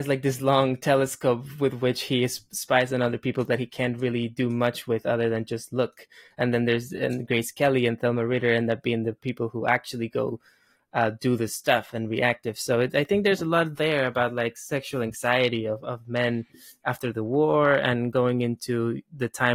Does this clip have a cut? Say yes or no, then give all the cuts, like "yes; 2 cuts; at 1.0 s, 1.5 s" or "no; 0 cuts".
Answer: no; 0 cuts